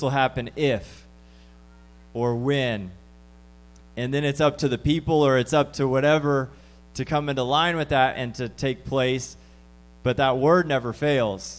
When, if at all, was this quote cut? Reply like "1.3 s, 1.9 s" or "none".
none